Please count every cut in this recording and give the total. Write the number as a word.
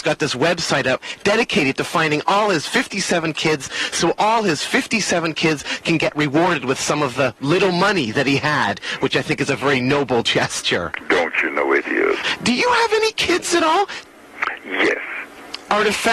zero